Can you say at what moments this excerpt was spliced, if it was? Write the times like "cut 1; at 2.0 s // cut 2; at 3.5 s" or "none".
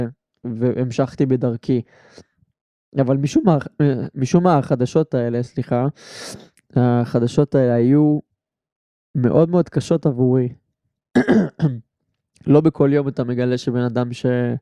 none